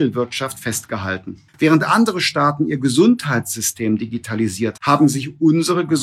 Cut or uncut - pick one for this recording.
cut